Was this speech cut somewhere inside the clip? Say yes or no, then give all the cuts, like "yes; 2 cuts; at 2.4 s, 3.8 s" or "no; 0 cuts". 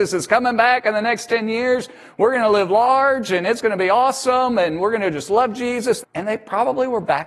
yes; 1 cut; at 6.0 s